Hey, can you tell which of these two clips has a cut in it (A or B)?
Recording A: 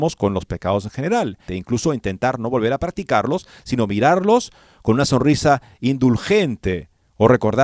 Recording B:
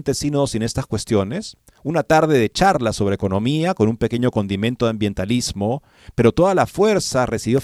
A